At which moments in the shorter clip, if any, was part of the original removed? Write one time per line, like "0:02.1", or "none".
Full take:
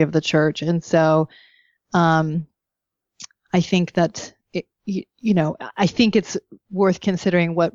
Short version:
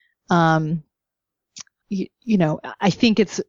0:01.8